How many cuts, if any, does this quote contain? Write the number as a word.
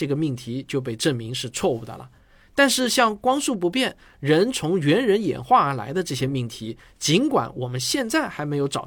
zero